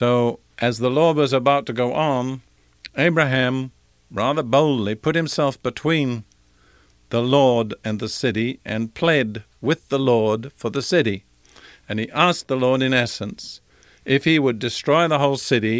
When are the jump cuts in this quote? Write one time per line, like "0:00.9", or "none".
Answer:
none

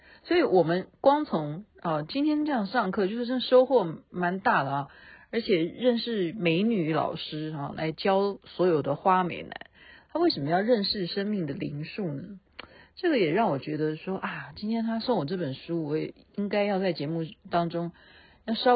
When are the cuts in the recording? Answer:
none

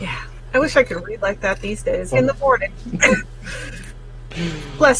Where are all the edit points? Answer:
0:02.1
0:03.2

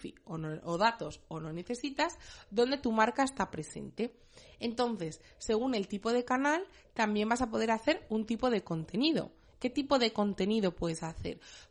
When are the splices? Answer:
0:09.5

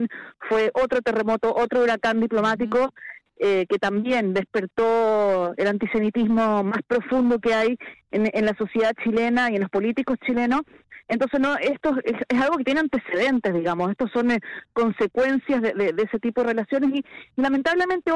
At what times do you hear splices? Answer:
none

